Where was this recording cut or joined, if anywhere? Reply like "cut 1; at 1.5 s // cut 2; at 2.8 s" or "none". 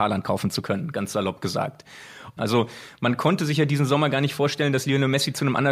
cut 1; at 2.4 s